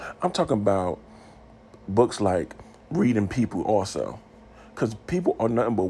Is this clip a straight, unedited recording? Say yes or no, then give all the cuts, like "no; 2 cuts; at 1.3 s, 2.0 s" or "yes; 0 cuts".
yes; 0 cuts